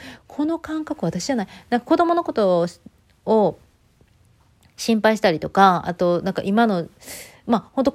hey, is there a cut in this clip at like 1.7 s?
no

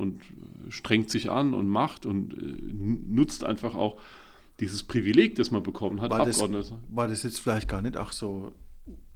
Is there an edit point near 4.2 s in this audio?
no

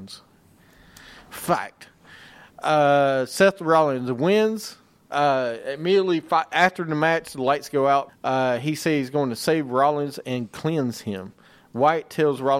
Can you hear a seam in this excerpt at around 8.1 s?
yes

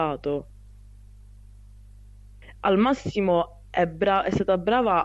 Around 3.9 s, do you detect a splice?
no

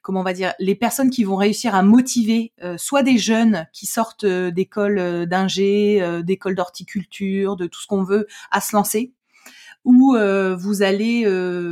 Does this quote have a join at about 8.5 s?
no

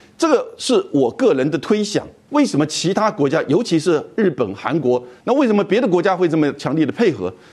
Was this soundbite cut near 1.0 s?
no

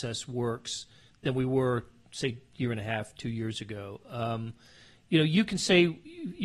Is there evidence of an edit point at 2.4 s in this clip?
no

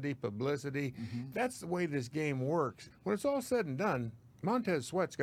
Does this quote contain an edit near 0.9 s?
no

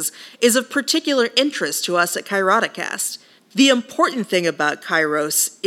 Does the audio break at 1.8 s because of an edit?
no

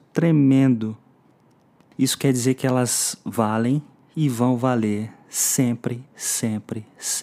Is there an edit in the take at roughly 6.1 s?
no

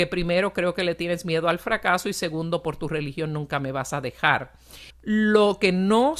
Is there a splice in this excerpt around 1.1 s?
no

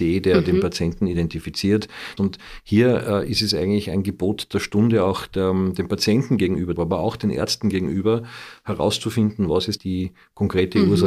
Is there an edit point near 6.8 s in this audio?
yes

